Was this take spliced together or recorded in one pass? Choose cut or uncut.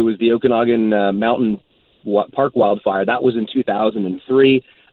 uncut